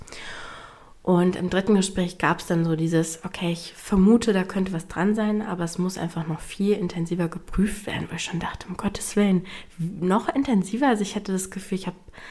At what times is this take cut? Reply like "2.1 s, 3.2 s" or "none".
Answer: none